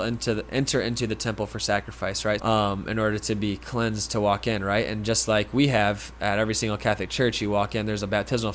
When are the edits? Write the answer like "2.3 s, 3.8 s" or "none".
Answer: 2.4 s